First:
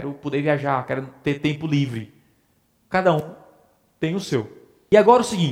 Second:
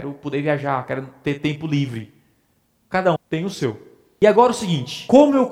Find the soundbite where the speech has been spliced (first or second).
second